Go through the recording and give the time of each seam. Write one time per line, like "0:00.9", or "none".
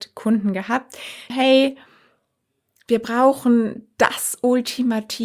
0:01.3

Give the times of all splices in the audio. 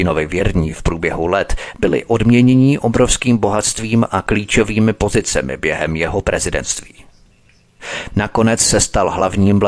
0:08.1

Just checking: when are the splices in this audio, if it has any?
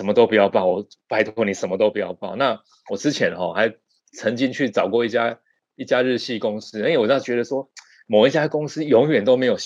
none

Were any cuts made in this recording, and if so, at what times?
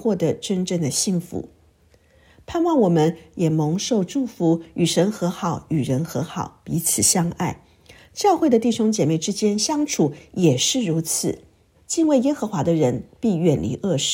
0:11.7

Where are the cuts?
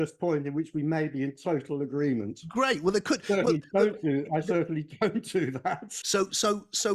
0:06.0

